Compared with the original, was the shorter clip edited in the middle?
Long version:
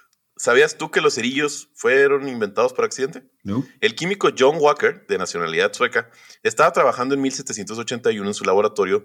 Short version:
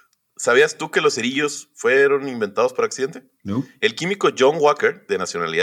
no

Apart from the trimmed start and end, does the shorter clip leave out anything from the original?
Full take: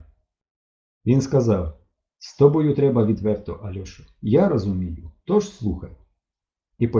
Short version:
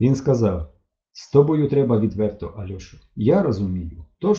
no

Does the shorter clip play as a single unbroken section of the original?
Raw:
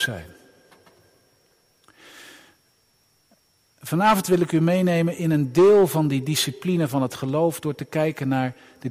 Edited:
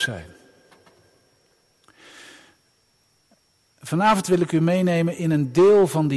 yes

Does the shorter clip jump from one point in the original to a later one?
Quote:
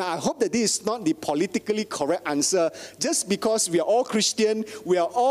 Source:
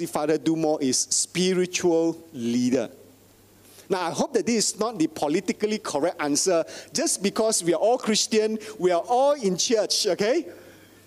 no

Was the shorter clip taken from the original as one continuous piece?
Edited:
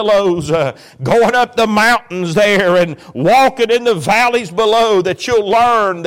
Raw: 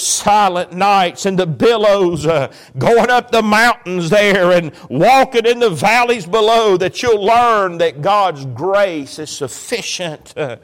yes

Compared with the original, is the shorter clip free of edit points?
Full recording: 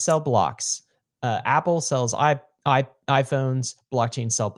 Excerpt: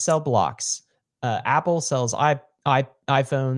yes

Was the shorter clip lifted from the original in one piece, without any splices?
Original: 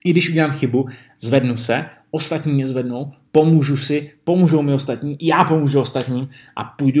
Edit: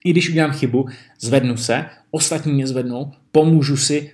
yes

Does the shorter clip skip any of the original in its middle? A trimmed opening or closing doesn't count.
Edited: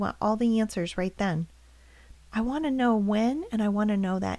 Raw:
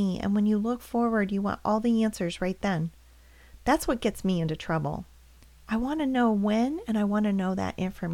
yes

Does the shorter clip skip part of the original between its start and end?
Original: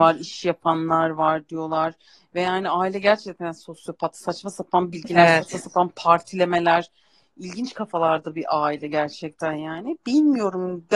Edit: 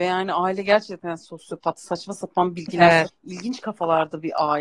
yes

